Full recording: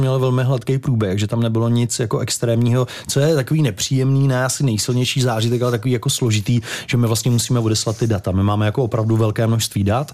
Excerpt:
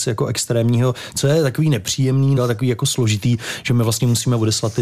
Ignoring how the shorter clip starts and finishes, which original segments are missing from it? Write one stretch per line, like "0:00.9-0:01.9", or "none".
0:04.3-0:05.6